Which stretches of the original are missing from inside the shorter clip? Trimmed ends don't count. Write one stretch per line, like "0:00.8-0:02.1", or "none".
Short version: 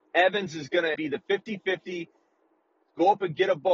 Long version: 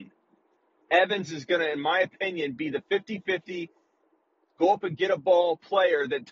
0:01.7-0:02.6